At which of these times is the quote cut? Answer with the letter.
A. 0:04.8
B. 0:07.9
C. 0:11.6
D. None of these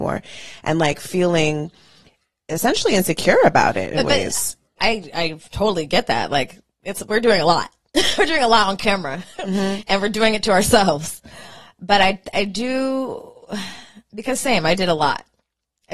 A